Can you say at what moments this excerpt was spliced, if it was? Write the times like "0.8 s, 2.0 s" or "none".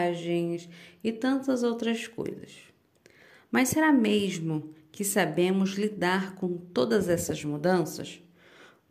none

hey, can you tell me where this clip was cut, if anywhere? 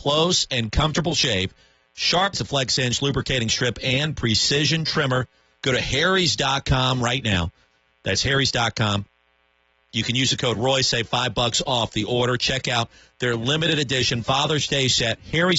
2.3 s

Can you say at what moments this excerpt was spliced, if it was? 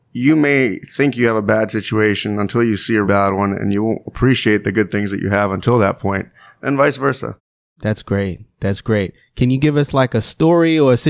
3.0 s

